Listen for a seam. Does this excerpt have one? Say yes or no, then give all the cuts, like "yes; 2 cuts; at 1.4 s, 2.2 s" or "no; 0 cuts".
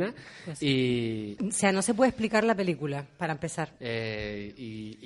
yes; 2 cuts; at 1.4 s, 3.8 s